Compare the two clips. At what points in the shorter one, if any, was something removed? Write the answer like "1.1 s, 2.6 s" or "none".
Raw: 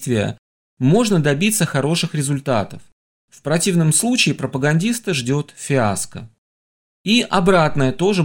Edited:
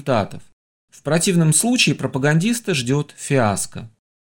none